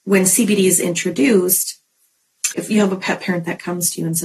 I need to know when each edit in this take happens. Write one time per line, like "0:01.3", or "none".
0:02.5